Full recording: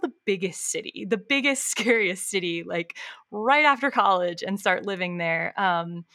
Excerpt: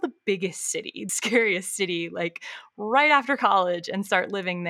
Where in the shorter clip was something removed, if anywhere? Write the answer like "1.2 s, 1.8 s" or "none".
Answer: 1.1 s